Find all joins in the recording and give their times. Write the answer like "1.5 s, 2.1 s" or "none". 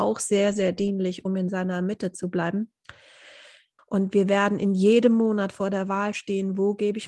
3.8 s